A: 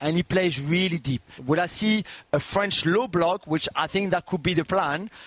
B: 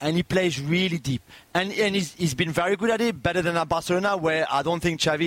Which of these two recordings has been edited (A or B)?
A